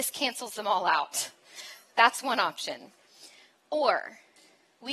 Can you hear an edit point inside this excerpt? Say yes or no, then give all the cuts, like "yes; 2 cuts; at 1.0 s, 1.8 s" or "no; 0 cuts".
no; 0 cuts